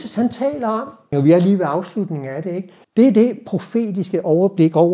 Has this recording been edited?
yes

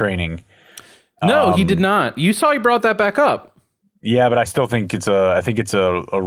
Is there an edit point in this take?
no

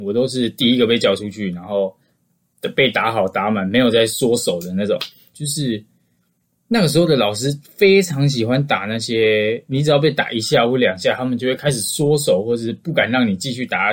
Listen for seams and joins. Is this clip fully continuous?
no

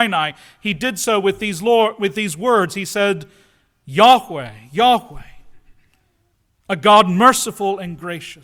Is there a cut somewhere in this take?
no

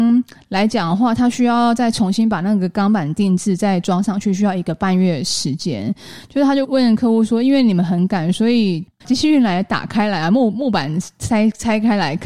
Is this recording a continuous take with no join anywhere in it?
no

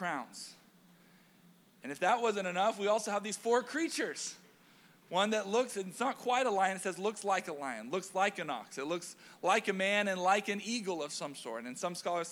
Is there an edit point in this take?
no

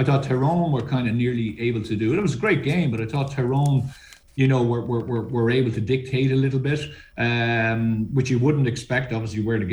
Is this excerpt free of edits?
no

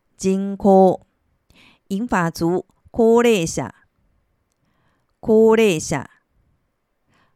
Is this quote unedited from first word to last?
yes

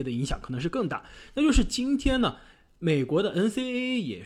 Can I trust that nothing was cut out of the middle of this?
yes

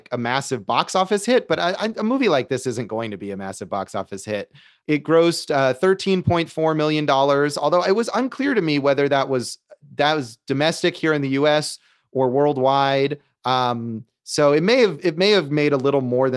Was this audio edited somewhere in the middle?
no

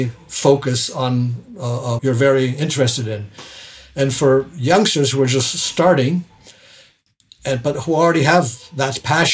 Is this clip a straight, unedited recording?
no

